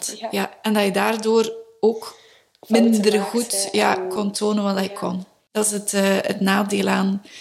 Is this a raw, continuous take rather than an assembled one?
yes; 0 cuts

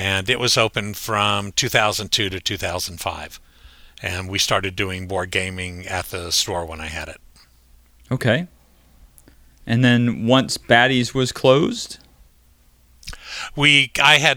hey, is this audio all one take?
yes; 0 cuts

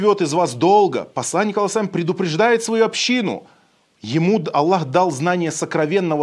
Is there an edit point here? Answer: no; 0 cuts

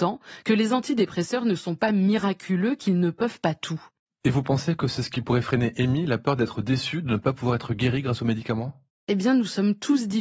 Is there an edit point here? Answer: no; 0 cuts

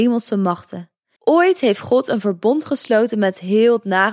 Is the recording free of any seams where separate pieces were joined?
no; 1 cut; at 1.2 s

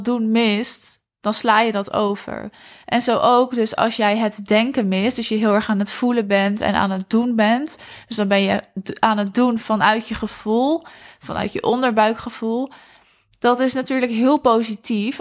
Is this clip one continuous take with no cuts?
yes; 0 cuts

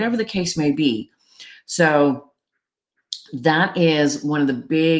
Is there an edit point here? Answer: no; 0 cuts

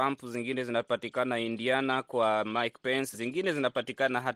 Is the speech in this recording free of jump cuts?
no; 1 cut; at 3.1 s

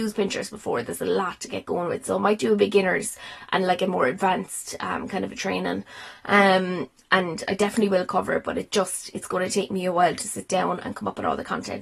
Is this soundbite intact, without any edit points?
yes; 0 cuts

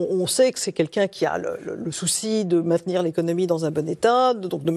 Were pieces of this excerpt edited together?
no; 0 cuts

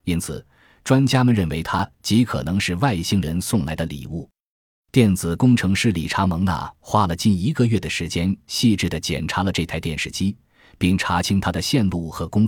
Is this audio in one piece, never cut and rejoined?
yes; 0 cuts

